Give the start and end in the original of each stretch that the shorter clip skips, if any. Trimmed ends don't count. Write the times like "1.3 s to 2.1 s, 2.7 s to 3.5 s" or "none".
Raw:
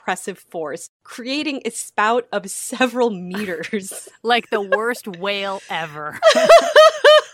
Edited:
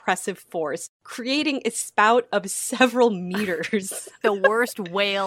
4.2 s to 4.5 s